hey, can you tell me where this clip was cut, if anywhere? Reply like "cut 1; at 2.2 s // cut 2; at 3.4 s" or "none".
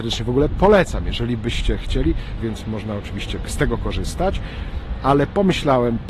cut 1; at 2.4 s